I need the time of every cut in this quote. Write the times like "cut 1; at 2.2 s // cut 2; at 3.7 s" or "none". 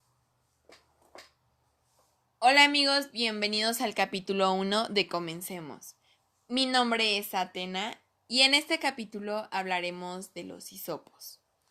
none